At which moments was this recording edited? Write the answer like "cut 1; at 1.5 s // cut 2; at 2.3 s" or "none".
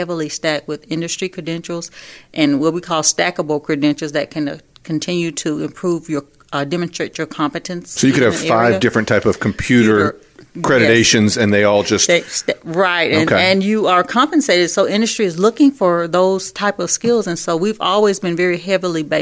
none